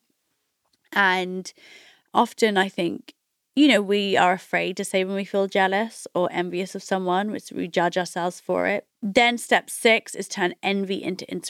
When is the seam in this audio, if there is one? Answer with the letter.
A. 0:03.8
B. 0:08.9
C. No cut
B